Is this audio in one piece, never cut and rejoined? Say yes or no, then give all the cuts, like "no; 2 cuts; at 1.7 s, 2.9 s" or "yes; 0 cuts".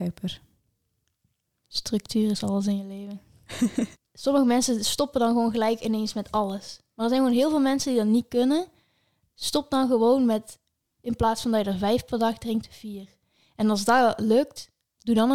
no; 1 cut; at 3.9 s